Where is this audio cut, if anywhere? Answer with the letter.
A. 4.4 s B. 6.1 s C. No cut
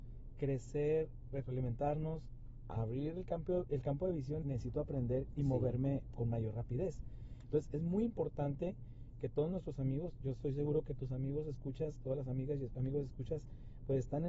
A